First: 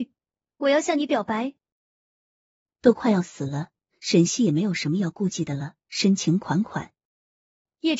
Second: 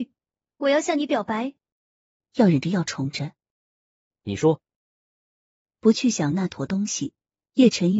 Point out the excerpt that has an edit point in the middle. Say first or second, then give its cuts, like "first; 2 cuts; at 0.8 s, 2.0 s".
second; 1 cut; at 2.2 s